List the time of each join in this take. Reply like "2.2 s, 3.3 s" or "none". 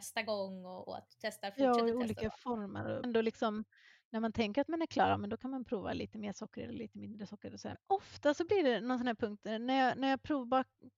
3.0 s, 7.7 s